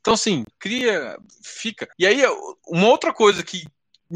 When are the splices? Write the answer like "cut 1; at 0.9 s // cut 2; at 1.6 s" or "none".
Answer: cut 1; at 1.9 s